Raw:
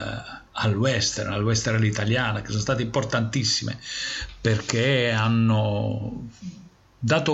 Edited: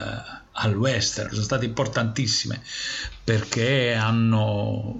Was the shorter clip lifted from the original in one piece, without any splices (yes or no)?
no